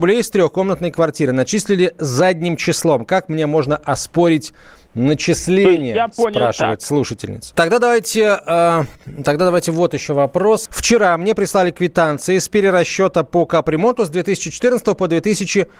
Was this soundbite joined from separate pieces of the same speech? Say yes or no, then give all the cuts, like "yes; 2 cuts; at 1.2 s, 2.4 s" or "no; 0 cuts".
yes; 2 cuts; at 7.5 s, 10.7 s